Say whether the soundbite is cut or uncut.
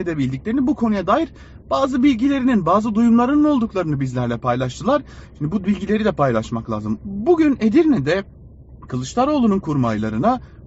cut